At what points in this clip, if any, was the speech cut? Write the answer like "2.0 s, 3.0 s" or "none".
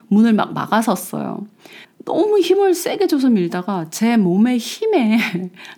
1.8 s